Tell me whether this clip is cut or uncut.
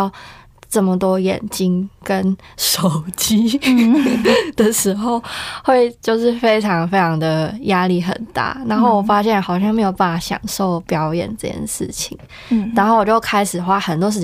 uncut